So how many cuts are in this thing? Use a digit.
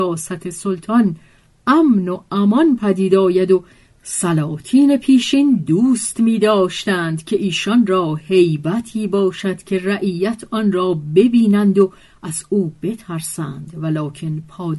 0